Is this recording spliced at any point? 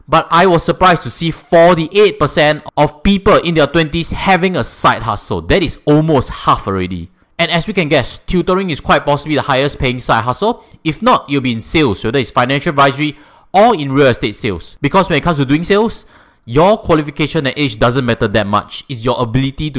no; 0 cuts

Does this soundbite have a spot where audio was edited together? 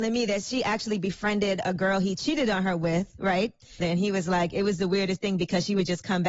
yes; 1 cut; at 3.8 s

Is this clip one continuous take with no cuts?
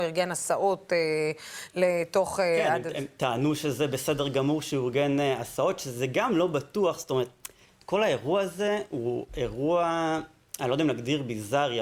yes; 0 cuts

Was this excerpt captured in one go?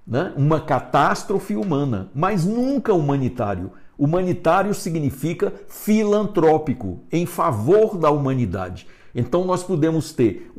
yes; 0 cuts

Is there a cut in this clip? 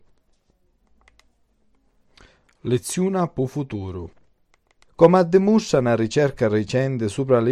yes; 1 cut; at 4.9 s

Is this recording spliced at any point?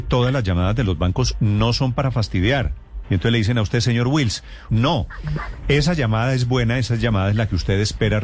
yes; 2 cuts; at 3.0 s, 4.7 s

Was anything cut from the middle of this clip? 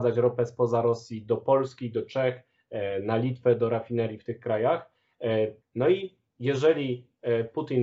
yes; 1 cut; at 5.6 s

